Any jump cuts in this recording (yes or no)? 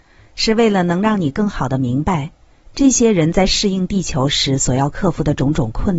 no